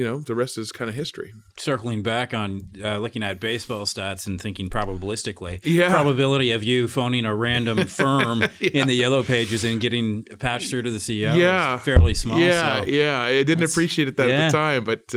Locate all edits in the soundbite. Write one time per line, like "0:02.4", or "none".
none